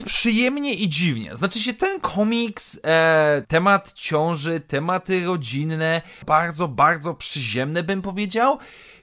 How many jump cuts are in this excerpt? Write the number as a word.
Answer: two